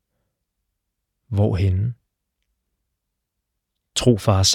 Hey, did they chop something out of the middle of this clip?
no; 0 cuts

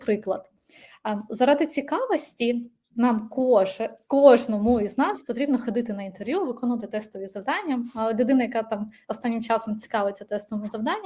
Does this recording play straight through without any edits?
yes; 0 cuts

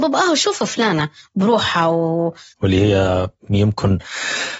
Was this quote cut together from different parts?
yes; 1 cut; at 2.5 s

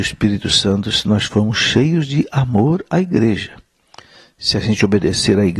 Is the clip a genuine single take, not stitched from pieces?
yes; 0 cuts

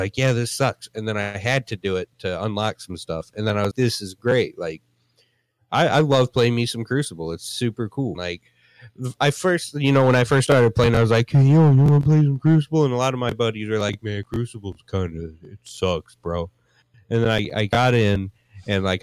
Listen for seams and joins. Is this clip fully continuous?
no; 2 cuts; at 3.7 s, 8.2 s

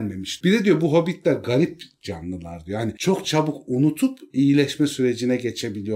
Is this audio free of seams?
yes; 0 cuts

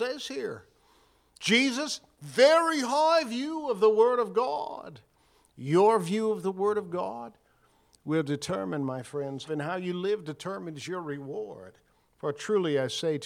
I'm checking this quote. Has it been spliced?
yes; 2 cuts; at 9.5 s, 12.1 s

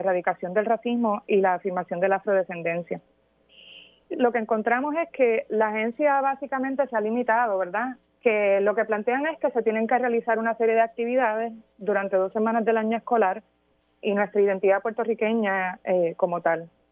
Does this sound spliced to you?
yes; 3 cuts; at 4.1 s, 8.1 s, 14.0 s

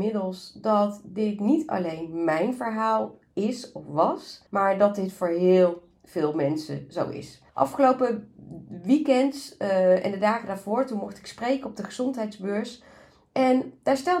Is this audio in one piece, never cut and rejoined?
no; 2 cuts; at 4.5 s, 7.5 s

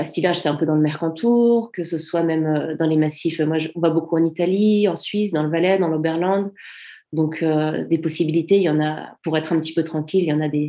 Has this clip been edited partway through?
no; 0 cuts

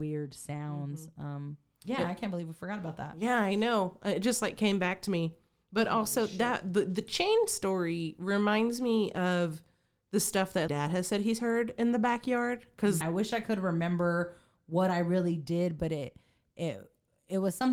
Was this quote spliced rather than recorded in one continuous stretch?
yes; 2 cuts; at 10.7 s, 13.0 s

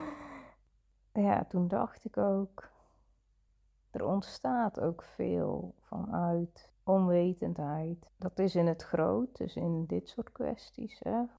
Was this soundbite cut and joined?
no; 0 cuts

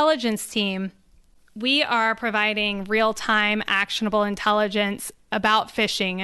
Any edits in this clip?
no; 0 cuts

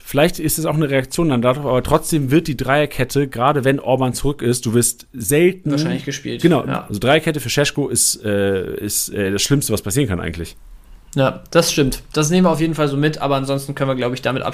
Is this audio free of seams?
no; 1 cut; at 6.9 s

